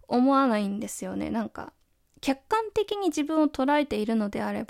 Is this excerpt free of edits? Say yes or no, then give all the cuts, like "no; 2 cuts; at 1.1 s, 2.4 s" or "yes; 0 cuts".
yes; 0 cuts